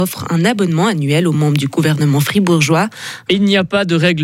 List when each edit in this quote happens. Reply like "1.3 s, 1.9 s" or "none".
3.3 s